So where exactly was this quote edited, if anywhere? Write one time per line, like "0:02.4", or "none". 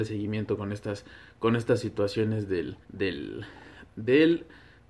0:02.8